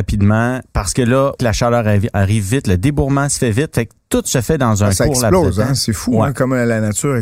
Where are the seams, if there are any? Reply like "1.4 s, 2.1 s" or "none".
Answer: 1.4 s

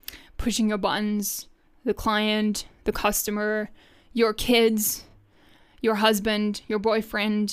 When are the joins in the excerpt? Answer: none

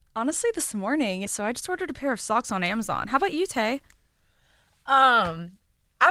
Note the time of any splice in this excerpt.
1.3 s

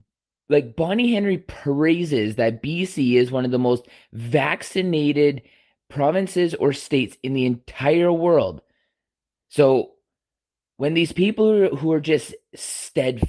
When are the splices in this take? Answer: 9.3 s

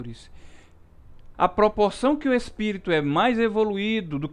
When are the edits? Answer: 1.3 s

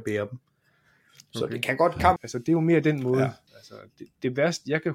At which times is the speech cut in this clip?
2.2 s, 3.5 s

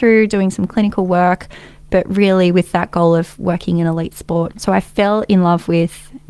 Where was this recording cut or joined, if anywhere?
4.5 s

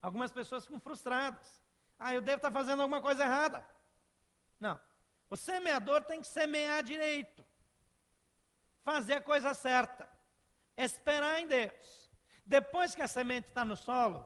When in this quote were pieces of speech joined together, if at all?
10.6 s

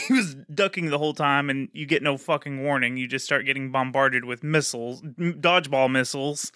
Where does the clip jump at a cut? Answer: none

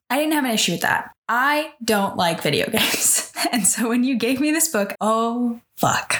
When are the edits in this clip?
5.0 s

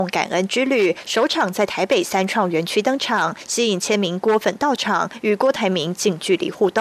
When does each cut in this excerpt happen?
none

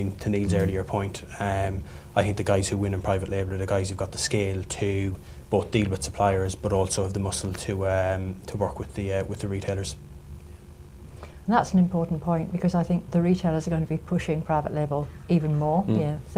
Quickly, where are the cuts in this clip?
none

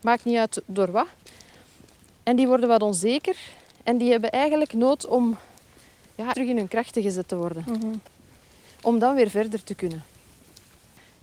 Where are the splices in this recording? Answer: 6.3 s

